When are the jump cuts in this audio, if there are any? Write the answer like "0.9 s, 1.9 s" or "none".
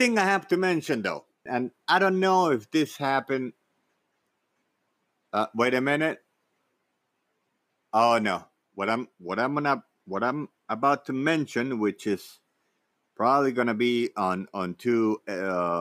1.5 s